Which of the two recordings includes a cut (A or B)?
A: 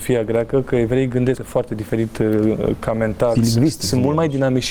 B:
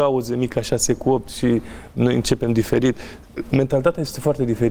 A